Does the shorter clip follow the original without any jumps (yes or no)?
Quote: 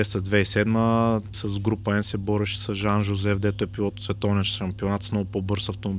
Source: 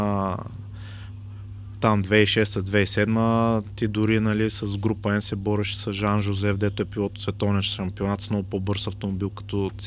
no